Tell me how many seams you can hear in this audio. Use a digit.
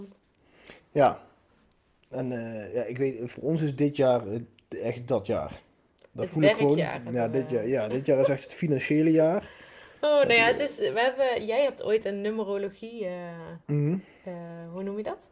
0